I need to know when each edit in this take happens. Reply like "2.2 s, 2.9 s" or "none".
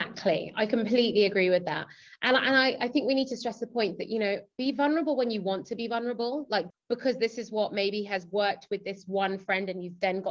6.7 s